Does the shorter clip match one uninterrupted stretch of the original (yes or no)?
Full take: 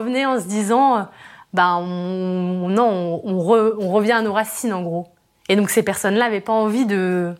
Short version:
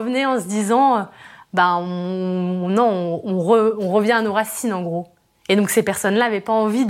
yes